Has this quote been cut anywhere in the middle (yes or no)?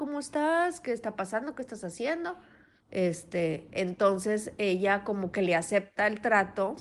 yes